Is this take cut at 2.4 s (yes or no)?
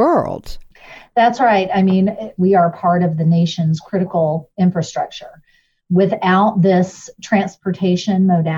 yes